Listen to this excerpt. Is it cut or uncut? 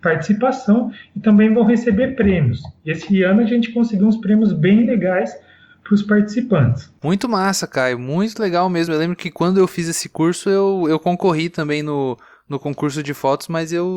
uncut